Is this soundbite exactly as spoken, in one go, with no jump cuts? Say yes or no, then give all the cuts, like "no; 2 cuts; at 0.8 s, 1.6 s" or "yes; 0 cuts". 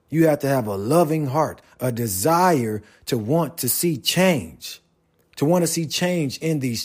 yes; 0 cuts